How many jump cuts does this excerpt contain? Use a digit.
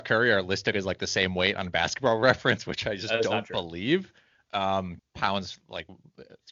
1